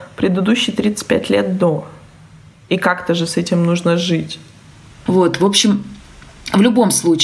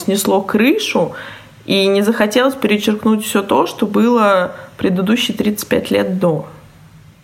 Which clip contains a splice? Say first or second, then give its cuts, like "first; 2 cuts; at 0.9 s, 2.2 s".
first; 1 cut; at 5.1 s